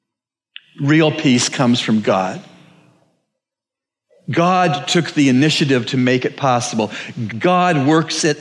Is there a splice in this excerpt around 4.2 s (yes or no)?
no